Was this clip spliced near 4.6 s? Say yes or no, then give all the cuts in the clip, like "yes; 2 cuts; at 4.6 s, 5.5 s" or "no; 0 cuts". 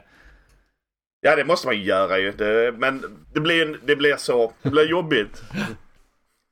yes; 2 cuts; at 3.2 s, 4.6 s